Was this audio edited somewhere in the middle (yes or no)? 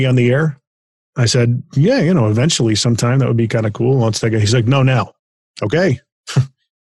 no